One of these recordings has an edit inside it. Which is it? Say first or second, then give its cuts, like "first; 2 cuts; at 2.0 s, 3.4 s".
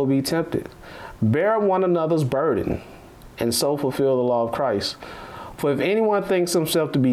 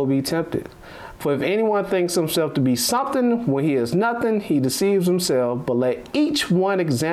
second; 1 cut; at 1.2 s